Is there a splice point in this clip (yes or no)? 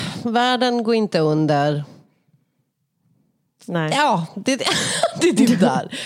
no